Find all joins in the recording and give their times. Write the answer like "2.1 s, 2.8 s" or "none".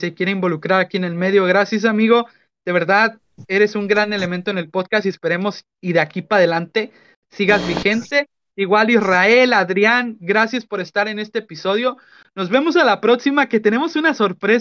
none